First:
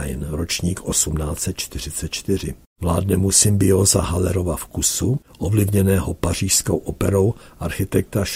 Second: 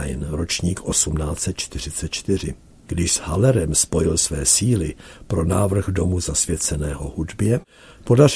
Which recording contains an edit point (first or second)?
first